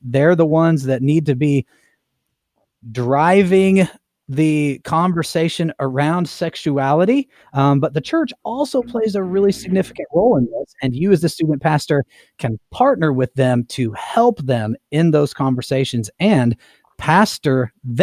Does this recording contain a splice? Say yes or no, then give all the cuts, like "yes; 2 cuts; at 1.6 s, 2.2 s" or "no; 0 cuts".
no; 0 cuts